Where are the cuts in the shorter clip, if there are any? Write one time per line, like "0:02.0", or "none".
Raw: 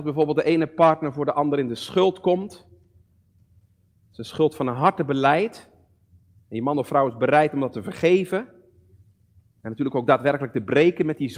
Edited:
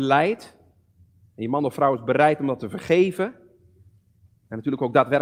none